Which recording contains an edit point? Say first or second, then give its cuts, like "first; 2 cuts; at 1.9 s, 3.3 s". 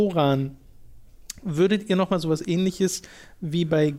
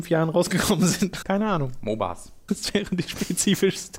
second; 2 cuts; at 1.2 s, 2.5 s